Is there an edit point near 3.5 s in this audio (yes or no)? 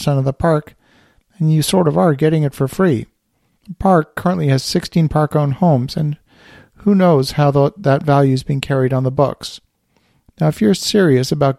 yes